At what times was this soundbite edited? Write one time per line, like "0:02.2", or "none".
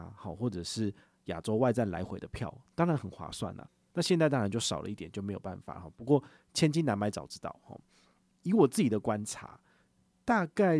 none